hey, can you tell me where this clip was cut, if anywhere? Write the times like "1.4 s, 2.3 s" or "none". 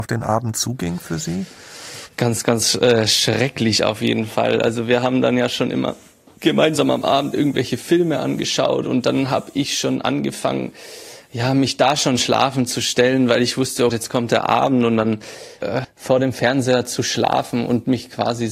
13.9 s, 15.8 s